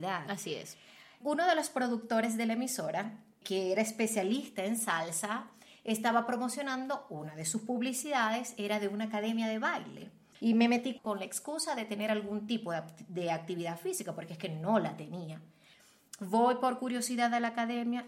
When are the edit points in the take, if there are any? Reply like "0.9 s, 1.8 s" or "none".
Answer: none